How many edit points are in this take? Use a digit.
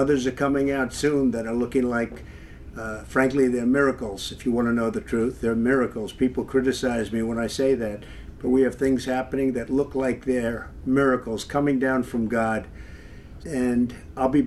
1